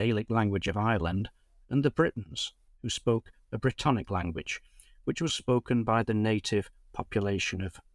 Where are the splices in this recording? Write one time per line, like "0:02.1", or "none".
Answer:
0:05.3